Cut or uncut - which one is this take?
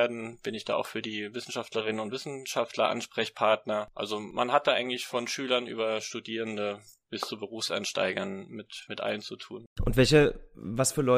uncut